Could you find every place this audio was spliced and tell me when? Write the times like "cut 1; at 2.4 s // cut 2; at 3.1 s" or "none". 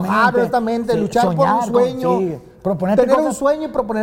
none